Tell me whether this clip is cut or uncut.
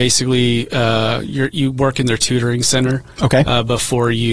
uncut